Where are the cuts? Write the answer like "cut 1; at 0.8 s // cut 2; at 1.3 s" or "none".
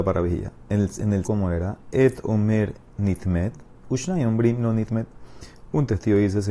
cut 1; at 1.2 s